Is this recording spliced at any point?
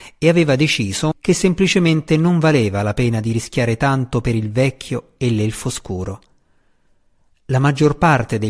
yes; 1 cut; at 1.1 s

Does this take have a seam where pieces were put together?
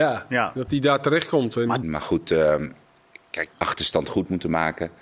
yes; 2 cuts; at 1.8 s, 3.5 s

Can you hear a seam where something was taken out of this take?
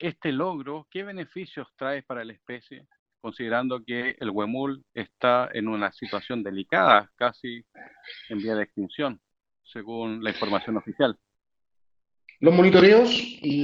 no; 0 cuts

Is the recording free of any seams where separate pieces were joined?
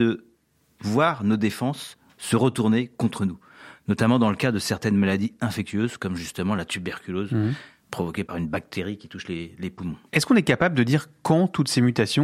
yes; 0 cuts

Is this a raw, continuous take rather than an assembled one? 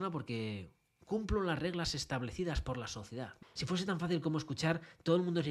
no; 1 cut; at 3.4 s

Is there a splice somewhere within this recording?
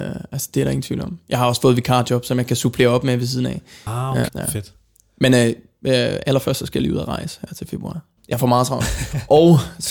yes; 2 cuts; at 4.3 s, 8.2 s

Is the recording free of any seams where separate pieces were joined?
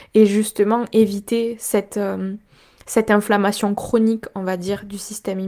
yes; 0 cuts

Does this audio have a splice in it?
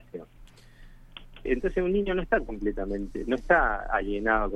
yes; 1 cut; at 1.5 s

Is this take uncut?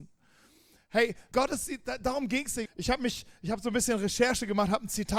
no; 2 cuts; at 1.3 s, 2.7 s

